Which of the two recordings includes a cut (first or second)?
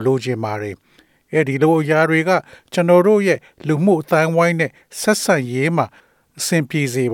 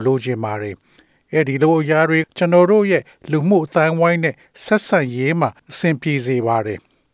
second